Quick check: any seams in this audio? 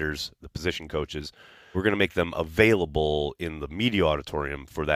yes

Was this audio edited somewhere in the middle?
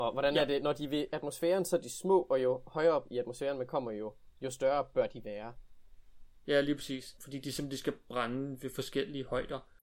yes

